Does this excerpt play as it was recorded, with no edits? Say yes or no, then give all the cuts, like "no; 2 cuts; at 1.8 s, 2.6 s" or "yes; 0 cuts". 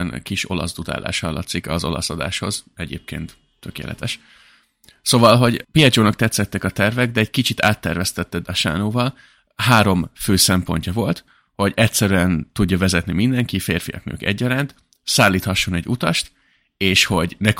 yes; 0 cuts